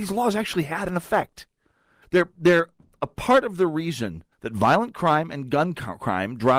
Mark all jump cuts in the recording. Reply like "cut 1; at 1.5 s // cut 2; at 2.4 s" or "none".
cut 1; at 2.0 s // cut 2; at 4.3 s